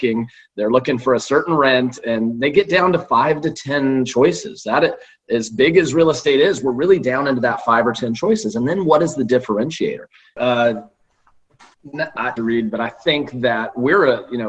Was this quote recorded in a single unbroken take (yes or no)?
no